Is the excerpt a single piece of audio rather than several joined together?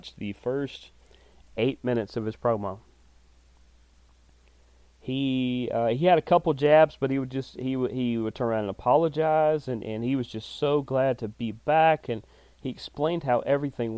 yes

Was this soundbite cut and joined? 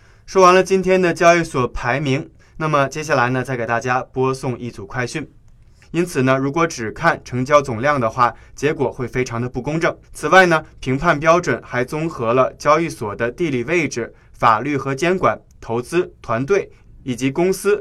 yes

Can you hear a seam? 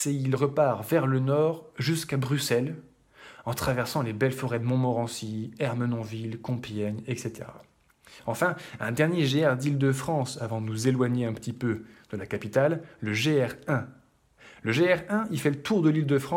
no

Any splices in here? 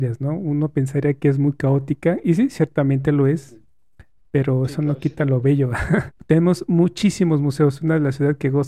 yes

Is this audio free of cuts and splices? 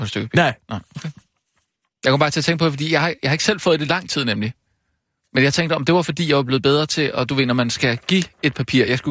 yes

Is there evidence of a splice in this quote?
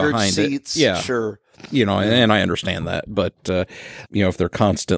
yes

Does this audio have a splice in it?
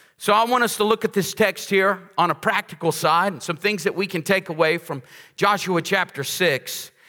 no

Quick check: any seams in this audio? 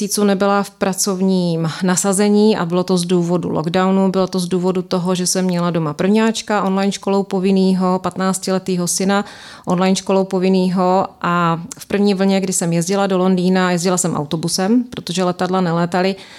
no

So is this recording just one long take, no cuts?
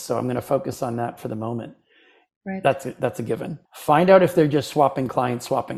no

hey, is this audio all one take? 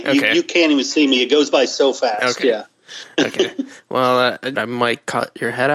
no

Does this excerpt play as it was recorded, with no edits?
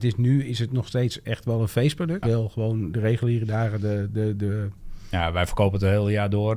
no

